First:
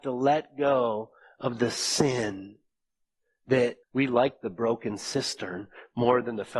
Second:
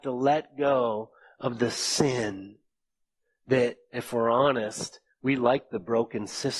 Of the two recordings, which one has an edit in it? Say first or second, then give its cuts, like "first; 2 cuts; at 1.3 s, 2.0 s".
first; 1 cut; at 3.8 s